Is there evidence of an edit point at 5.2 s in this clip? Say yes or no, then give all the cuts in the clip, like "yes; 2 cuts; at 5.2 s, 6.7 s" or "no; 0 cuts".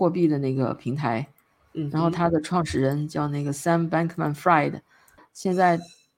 yes; 2 cuts; at 1.6 s, 5.2 s